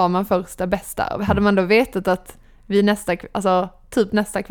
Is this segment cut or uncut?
uncut